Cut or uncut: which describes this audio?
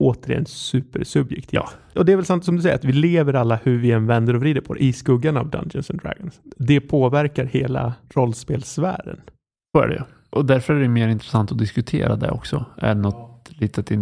uncut